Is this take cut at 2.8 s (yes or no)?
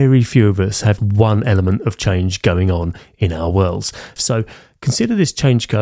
no